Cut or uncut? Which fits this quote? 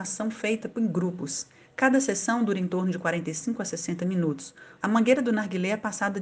cut